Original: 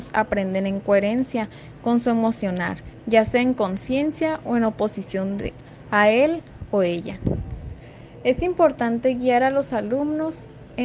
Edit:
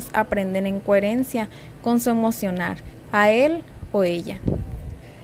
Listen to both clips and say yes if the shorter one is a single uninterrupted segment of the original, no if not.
no